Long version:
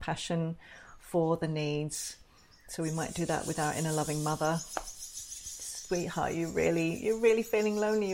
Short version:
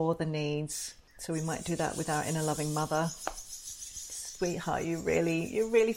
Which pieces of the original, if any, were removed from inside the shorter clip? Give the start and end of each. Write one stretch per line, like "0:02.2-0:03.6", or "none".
0:02.3-0:02.6